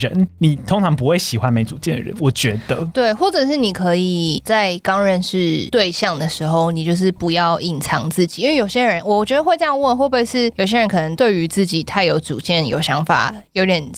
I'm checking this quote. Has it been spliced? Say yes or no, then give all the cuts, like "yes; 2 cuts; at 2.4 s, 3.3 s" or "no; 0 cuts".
no; 0 cuts